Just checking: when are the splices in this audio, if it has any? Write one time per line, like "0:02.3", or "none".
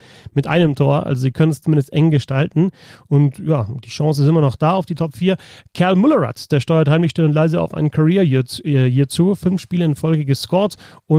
none